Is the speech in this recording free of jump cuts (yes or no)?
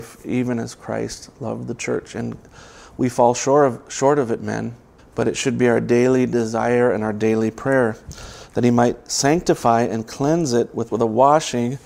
no